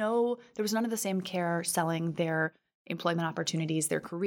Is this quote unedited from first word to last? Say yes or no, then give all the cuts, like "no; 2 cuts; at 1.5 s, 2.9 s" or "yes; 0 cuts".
yes; 0 cuts